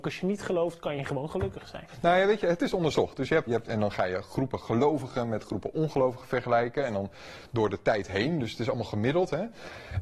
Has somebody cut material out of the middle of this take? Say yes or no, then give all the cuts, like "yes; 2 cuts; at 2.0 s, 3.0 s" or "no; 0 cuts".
yes; 1 cut; at 3.5 s